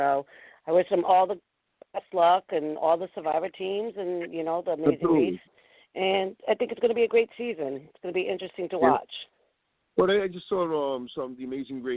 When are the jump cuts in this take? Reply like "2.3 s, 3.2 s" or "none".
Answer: none